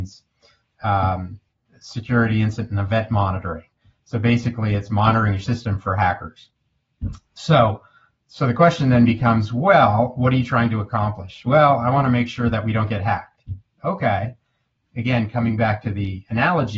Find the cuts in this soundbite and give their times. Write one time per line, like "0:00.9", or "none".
none